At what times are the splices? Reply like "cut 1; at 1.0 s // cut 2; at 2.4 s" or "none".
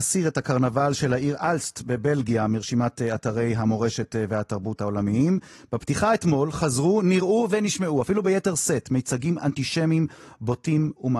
none